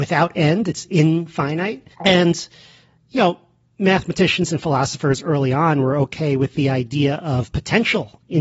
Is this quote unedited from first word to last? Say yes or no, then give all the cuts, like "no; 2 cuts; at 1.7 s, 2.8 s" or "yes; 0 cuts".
no; 1 cut; at 1.9 s